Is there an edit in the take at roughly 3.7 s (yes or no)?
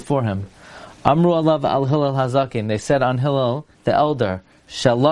yes